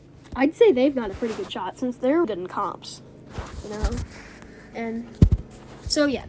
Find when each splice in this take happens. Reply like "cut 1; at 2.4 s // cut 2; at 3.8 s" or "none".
cut 1; at 2.2 s // cut 2; at 4.7 s